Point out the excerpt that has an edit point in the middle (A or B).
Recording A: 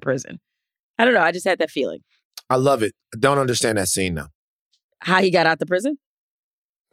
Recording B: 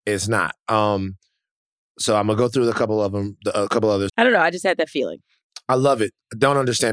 B